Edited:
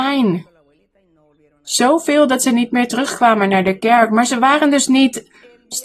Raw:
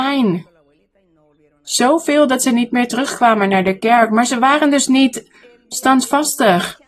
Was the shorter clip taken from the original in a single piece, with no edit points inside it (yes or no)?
yes